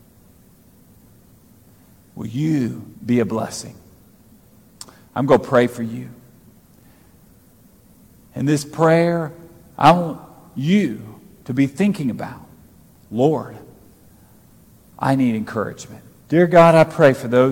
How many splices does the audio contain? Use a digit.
2